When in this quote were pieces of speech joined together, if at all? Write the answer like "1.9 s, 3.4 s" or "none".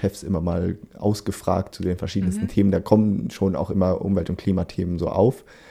none